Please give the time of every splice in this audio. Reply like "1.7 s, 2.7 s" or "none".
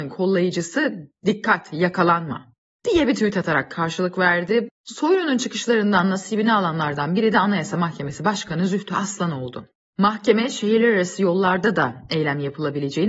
4.7 s